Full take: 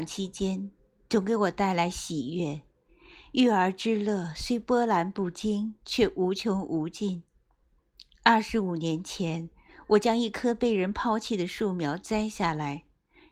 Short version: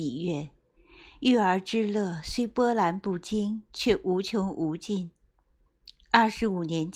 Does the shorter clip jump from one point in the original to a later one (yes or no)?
no